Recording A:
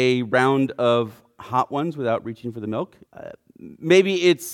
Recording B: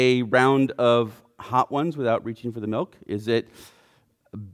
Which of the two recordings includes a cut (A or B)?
A